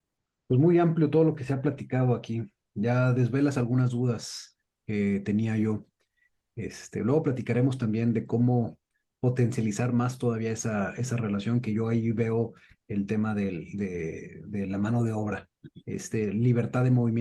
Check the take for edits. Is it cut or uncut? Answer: uncut